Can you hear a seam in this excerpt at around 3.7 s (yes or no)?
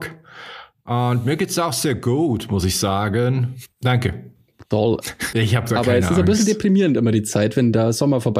yes